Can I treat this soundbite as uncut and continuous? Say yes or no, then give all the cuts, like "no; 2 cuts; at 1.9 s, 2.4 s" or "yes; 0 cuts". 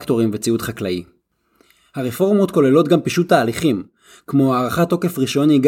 yes; 0 cuts